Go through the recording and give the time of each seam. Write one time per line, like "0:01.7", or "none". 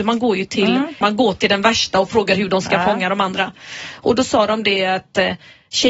0:01.0